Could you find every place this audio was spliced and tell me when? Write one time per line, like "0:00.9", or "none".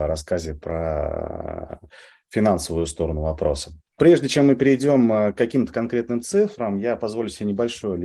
0:04.0

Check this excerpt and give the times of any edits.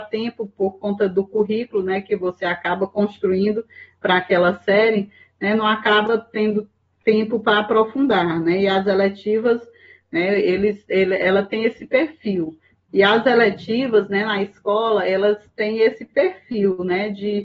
0:12.9

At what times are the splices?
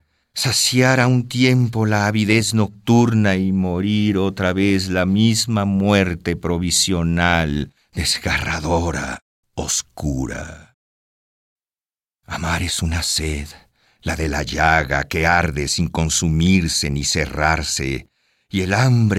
none

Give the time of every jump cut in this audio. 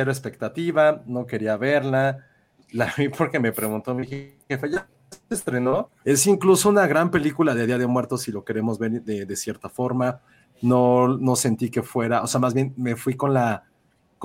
0:06.0
0:10.4

